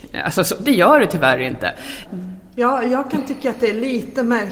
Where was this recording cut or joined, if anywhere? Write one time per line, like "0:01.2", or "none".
0:02.1